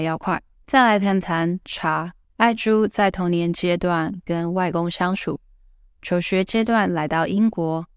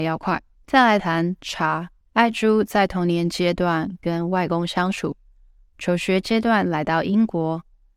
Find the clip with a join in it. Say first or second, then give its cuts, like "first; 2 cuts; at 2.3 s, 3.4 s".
second; 1 cut; at 1.0 s